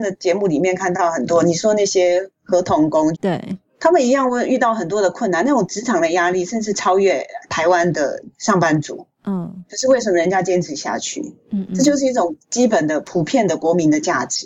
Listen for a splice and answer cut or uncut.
cut